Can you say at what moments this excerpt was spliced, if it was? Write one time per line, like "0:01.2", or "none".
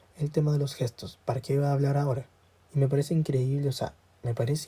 0:02.7

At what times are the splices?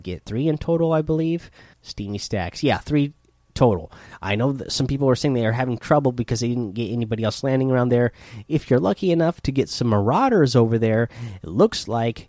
0:01.7

